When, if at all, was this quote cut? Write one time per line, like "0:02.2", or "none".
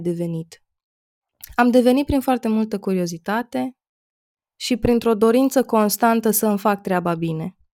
none